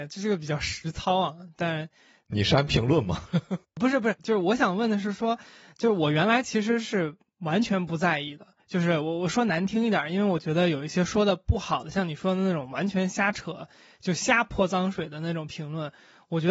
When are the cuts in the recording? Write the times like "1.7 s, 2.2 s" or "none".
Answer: none